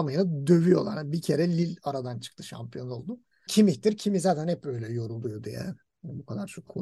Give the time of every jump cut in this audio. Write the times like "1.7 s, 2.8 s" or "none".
3.5 s